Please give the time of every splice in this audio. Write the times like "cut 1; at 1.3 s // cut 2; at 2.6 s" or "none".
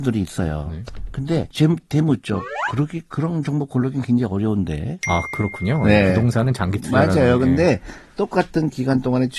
cut 1; at 5.0 s